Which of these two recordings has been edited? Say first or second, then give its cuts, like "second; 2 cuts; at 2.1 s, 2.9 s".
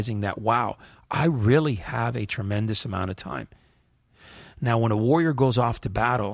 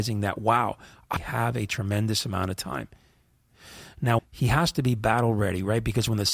second; 2 cuts; at 1.2 s, 4.2 s